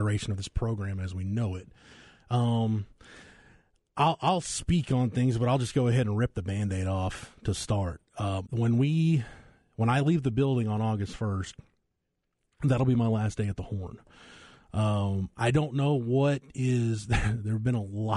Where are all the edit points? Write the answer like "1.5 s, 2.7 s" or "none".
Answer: 8.4 s